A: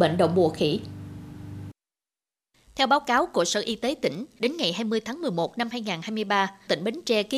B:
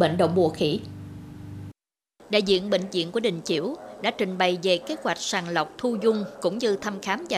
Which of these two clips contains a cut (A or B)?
B